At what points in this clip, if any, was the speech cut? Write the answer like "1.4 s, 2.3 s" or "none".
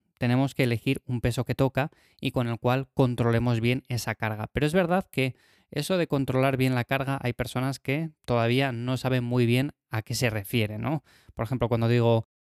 none